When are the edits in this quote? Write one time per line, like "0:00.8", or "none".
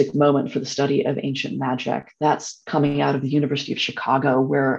none